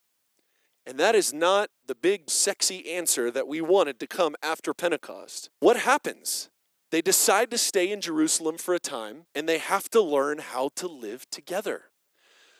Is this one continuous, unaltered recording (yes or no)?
no